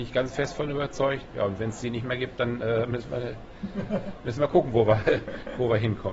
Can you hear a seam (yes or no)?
yes